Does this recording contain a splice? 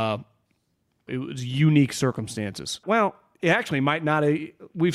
yes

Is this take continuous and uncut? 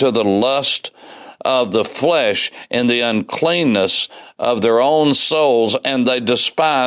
yes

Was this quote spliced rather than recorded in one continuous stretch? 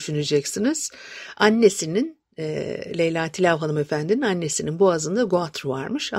no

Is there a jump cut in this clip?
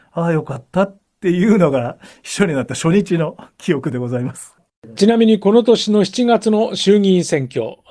yes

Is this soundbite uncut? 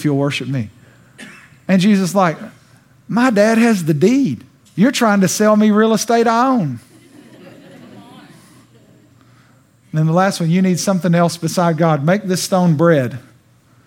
no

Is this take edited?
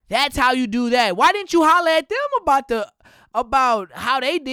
no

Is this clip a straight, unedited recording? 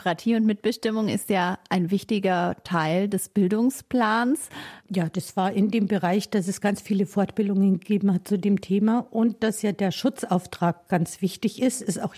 no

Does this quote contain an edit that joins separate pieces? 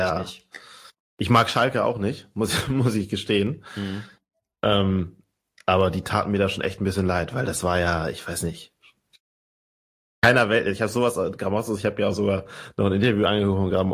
no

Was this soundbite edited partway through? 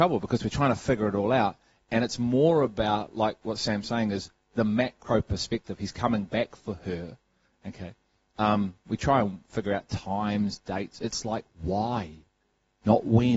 no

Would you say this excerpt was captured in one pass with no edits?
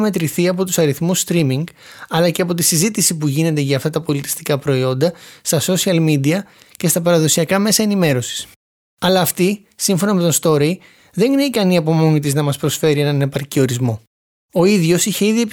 no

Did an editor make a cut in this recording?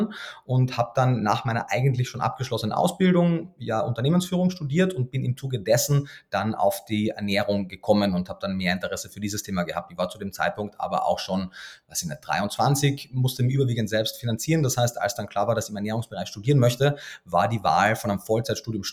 no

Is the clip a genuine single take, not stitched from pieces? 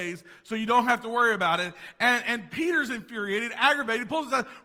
yes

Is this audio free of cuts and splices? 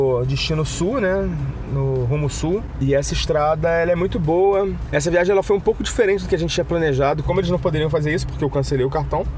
no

